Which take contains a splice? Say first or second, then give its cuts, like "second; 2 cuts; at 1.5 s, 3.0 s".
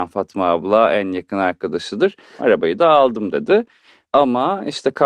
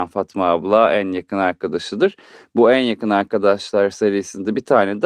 first; 2 cuts; at 2.4 s, 4.0 s